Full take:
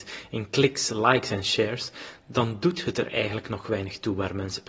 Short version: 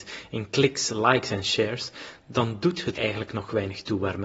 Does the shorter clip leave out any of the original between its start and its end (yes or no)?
yes